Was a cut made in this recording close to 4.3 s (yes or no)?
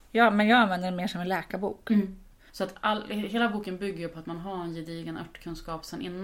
no